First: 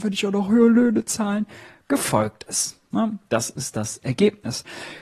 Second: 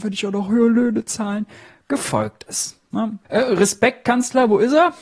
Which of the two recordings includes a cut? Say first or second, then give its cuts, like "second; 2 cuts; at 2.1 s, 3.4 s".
second; 1 cut; at 3.2 s